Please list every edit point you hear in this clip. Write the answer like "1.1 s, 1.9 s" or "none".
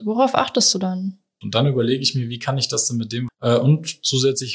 1.4 s, 3.3 s